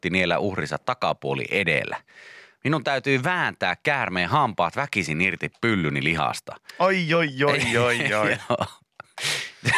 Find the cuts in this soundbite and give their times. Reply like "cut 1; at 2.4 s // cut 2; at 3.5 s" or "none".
none

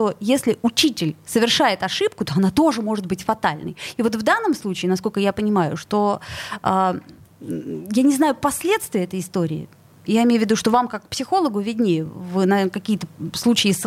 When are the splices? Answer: none

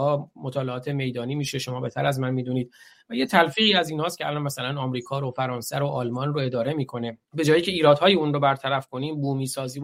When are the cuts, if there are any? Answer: cut 1; at 7.2 s

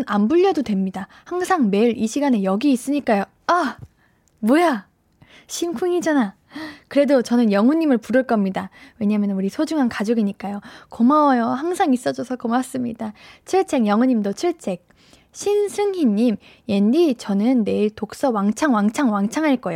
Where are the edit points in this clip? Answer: none

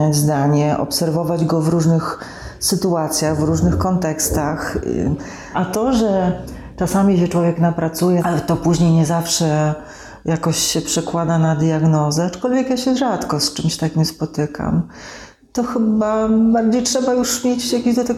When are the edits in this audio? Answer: cut 1; at 5.5 s // cut 2; at 8.2 s

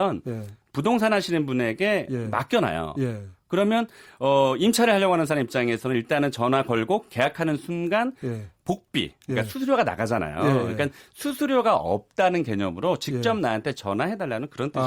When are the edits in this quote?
none

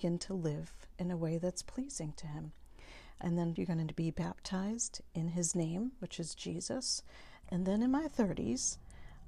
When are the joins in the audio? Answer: cut 1; at 3.6 s // cut 2; at 7.4 s

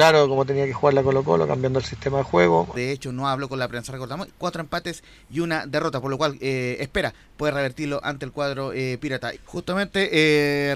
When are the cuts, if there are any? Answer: cut 1; at 2.7 s // cut 2; at 4.3 s // cut 3; at 9.3 s

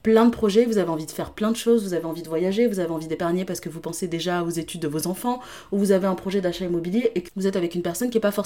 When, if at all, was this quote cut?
cut 1; at 7.3 s

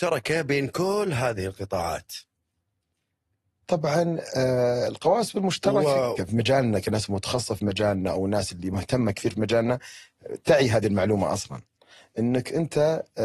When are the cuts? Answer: cut 1; at 6.2 s

